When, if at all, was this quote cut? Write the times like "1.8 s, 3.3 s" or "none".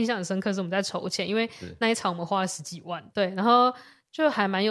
3.1 s